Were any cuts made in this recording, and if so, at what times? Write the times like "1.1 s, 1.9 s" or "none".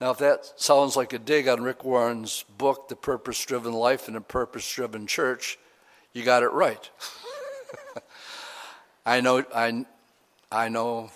none